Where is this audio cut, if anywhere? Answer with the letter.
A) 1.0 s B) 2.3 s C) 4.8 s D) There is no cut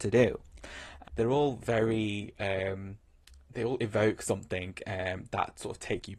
A